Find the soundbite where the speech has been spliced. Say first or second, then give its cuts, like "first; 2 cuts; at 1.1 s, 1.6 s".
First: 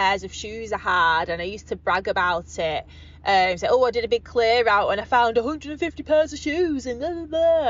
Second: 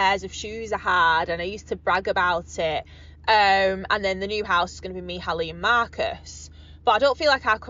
second; 1 cut; at 2.8 s